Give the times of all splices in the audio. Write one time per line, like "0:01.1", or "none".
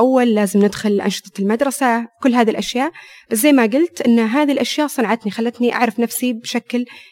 none